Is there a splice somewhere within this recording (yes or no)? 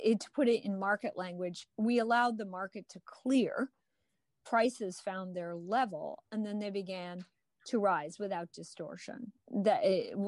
no